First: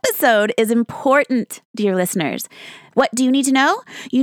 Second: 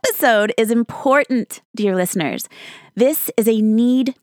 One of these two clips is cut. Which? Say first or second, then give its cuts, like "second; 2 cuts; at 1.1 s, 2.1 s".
first; 1 cut; at 2.9 s